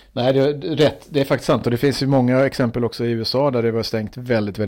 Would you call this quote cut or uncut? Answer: uncut